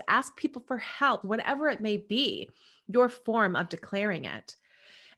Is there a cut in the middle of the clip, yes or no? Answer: yes